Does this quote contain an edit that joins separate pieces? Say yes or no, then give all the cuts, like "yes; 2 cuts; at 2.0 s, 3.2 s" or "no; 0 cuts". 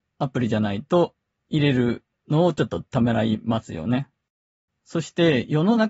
no; 0 cuts